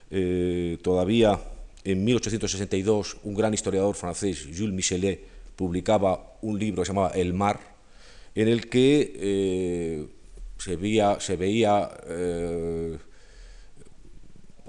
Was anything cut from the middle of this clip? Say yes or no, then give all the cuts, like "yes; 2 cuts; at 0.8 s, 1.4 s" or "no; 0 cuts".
no; 0 cuts